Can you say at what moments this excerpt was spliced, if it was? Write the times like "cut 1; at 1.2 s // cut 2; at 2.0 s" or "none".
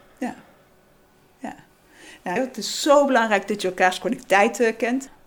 cut 1; at 2.4 s